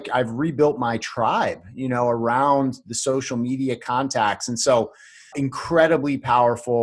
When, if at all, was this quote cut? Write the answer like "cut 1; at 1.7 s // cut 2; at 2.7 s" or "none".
cut 1; at 5.3 s